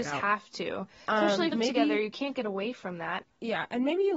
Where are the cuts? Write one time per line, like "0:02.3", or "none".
0:01.5
0:03.2